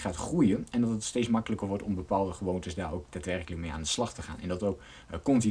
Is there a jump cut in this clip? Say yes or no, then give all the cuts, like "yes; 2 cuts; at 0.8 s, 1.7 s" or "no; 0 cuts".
no; 0 cuts